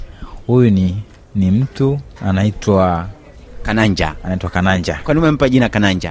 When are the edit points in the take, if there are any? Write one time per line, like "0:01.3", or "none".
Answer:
0:02.2